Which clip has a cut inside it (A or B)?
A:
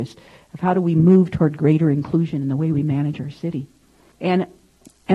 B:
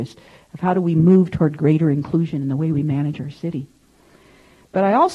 A